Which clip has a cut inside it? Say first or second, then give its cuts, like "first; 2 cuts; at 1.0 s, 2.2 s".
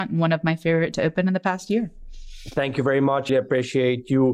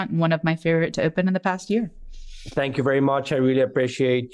first; 1 cut; at 3.3 s